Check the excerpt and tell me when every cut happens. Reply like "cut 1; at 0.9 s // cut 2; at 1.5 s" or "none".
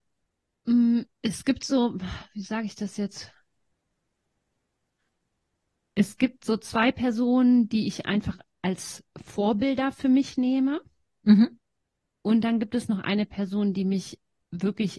none

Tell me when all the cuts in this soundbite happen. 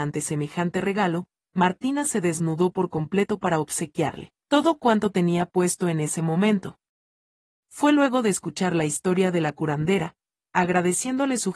cut 1; at 10.4 s

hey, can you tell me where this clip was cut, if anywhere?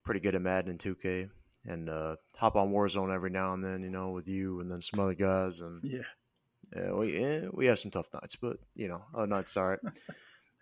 none

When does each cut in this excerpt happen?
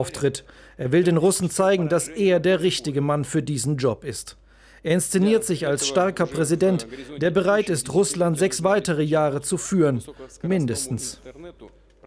none

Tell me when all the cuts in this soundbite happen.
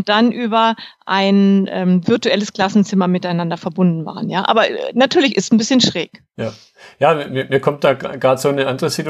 none

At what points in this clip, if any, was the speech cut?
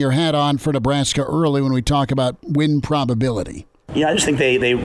none

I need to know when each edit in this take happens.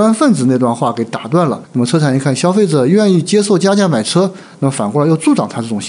cut 1; at 1.6 s

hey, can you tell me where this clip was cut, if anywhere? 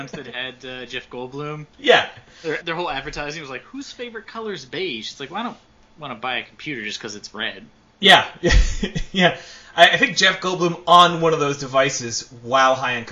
cut 1; at 2.6 s

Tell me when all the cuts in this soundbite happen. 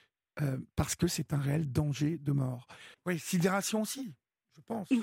cut 1; at 2.9 s

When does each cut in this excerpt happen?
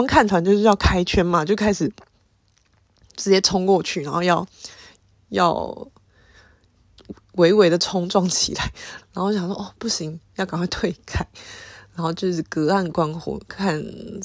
cut 1; at 9.0 s

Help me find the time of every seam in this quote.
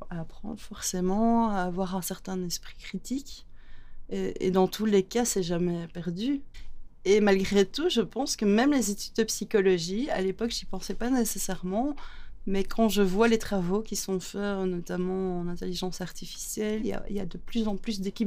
none

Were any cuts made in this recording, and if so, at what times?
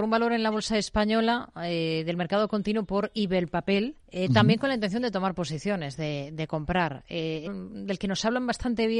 cut 1; at 4.0 s // cut 2; at 7.5 s

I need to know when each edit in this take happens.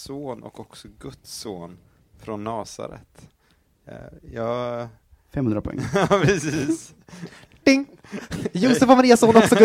none

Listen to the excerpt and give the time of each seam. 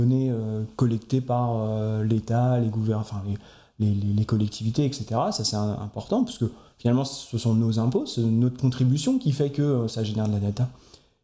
none

